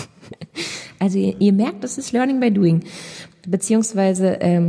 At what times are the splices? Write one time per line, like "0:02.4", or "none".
none